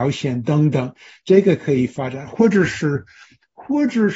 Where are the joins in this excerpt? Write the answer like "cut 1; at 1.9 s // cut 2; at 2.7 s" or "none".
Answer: none